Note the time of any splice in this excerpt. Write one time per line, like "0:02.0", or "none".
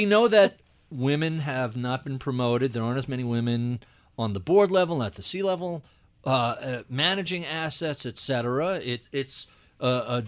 none